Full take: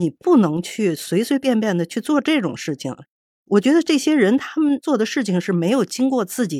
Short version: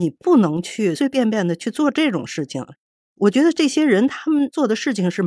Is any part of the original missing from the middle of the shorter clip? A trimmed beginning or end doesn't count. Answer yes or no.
yes